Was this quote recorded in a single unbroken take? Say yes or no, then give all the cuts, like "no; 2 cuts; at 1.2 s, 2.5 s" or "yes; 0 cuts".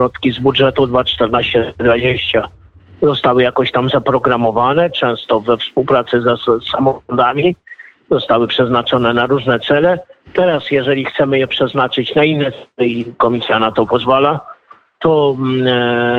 yes; 0 cuts